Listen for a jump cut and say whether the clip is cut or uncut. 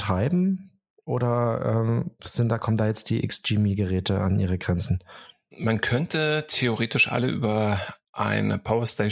uncut